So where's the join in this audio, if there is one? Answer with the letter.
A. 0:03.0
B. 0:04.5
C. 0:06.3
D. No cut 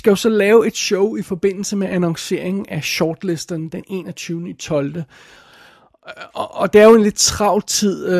D